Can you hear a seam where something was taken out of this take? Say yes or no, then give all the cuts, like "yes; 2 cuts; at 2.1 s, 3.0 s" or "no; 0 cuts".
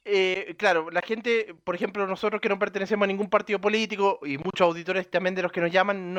no; 0 cuts